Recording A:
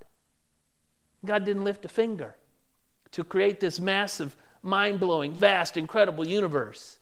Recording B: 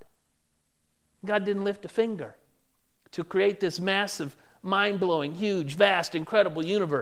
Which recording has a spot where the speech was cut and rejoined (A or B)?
A